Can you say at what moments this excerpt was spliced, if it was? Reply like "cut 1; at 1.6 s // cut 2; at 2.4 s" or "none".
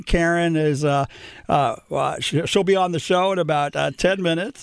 none